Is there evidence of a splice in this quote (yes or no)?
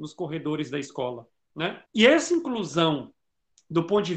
yes